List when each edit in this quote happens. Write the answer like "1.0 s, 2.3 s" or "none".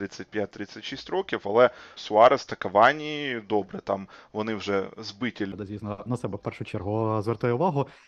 2.0 s